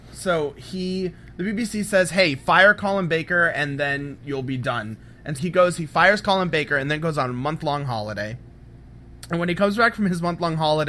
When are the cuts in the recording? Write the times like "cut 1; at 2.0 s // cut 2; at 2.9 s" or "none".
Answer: cut 1; at 5.4 s